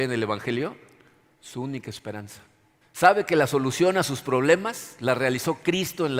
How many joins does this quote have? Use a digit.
1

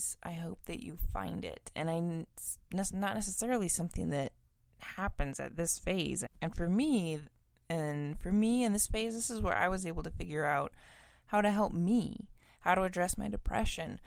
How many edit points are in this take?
1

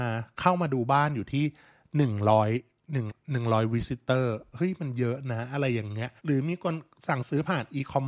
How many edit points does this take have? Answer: 2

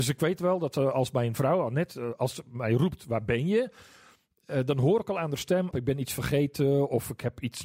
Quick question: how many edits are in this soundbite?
1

